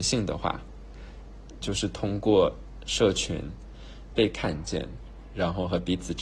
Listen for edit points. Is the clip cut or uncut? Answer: cut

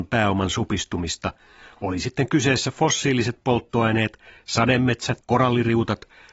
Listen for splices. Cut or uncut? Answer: cut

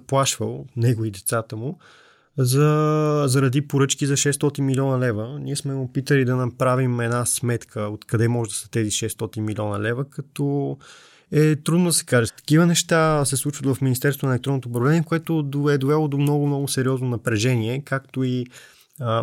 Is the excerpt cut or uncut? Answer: cut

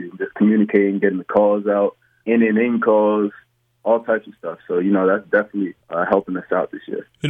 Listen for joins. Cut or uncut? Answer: cut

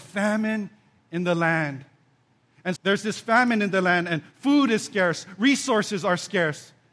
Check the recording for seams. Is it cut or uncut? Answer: cut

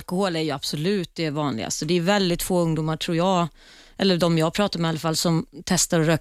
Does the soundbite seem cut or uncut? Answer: uncut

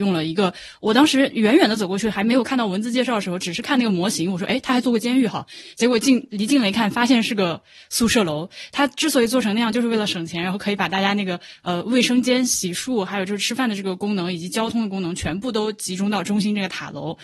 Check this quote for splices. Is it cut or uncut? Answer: uncut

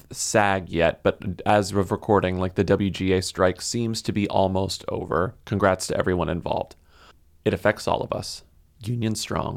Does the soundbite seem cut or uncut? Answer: uncut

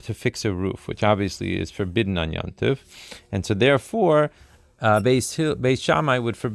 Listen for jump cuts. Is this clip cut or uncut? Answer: uncut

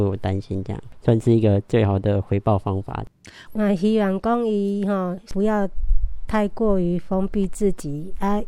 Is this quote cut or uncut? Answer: cut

